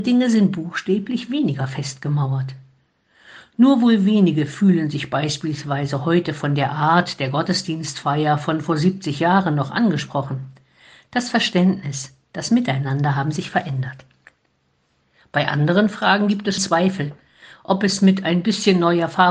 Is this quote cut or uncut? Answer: cut